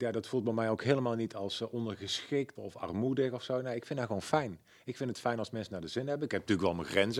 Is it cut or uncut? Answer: cut